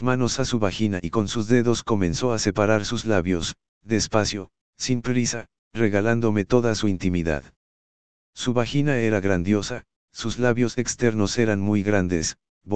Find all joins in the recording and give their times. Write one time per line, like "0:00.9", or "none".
none